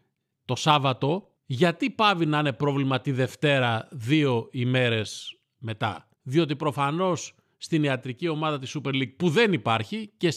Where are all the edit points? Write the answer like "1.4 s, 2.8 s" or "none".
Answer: 1.4 s, 6.1 s